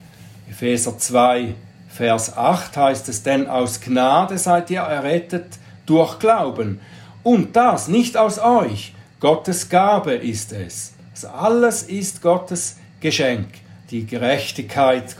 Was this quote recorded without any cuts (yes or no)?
no